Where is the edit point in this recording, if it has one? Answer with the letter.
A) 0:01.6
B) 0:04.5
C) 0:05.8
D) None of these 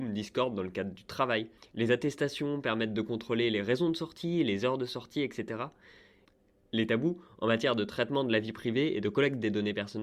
A